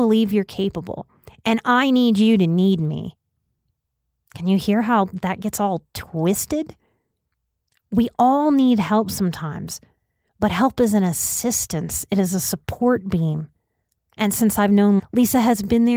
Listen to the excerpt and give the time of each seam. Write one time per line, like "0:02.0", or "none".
0:14.0
0:15.0